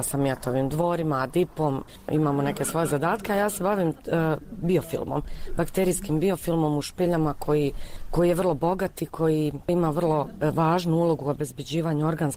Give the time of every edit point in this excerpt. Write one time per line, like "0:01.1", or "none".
none

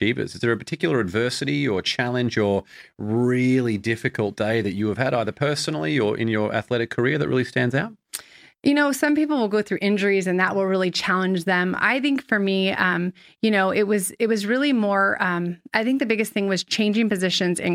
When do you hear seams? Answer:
none

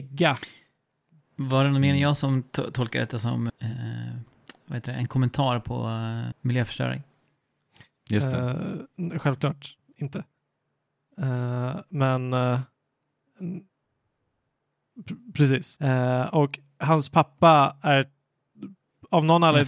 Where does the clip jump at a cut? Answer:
0:03.5
0:06.3
0:15.8

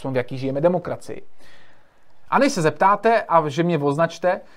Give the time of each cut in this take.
0:02.3

